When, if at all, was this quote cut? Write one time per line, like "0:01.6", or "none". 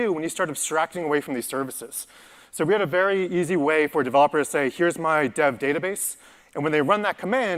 none